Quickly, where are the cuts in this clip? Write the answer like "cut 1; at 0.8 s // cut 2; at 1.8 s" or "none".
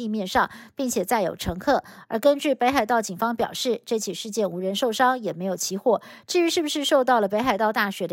none